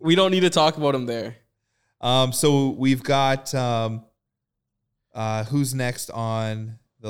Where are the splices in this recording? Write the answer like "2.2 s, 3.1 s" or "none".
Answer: none